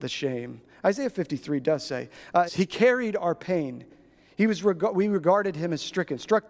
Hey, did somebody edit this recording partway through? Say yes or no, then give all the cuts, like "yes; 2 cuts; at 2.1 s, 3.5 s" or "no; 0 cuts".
yes; 1 cut; at 2.5 s